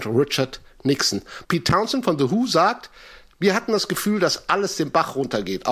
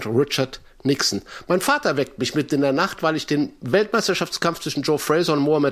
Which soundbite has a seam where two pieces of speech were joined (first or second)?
first